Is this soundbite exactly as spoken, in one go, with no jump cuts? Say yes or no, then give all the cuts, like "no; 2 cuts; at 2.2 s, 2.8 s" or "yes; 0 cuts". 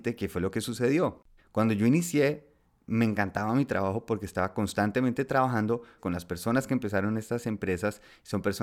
no; 2 cuts; at 1.4 s, 6.0 s